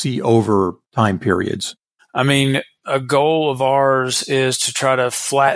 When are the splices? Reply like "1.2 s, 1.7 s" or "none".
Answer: 2.0 s

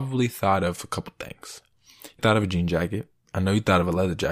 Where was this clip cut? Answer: 2.2 s

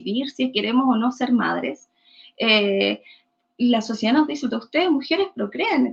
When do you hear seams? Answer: 4.5 s

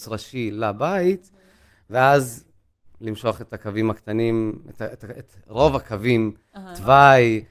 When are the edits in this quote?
6.5 s

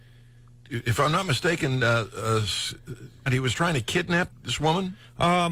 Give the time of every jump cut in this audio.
3.3 s, 4.3 s

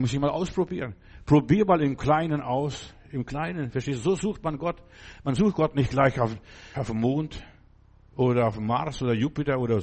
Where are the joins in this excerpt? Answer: 6.7 s

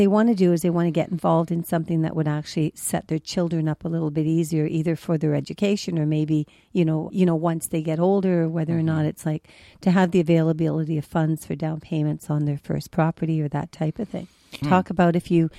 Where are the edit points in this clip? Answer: 14.6 s

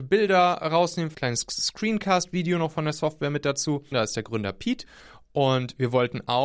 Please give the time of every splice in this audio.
1.1 s, 3.9 s

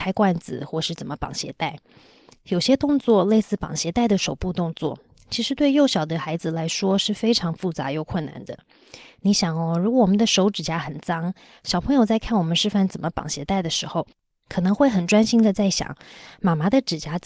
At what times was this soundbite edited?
none

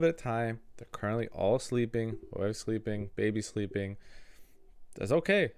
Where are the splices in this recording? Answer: none

